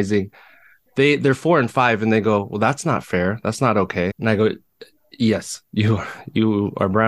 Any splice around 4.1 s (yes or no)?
yes